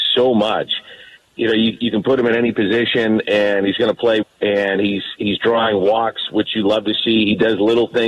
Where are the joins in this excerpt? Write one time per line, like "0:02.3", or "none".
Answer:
0:01.2
0:04.2